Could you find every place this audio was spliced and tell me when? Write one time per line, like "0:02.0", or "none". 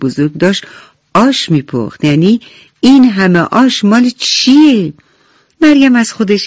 0:05.5